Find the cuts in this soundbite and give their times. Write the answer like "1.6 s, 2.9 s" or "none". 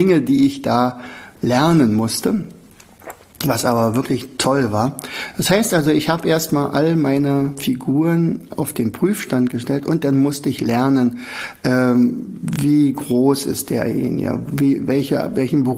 none

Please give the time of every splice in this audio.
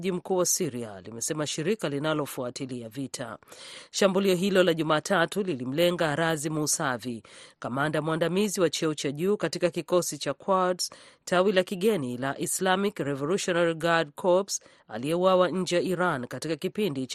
none

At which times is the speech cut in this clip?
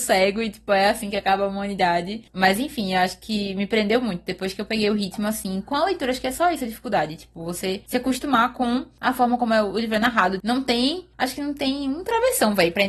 none

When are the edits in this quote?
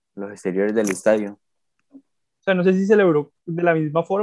2.3 s

